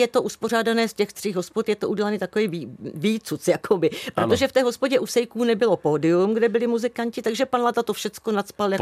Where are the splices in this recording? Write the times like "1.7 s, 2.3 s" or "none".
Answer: none